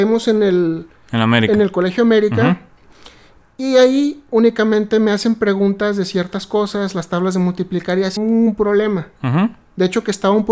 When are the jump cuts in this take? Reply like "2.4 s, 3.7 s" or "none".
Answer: 8.2 s

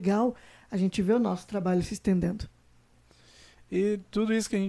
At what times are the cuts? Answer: none

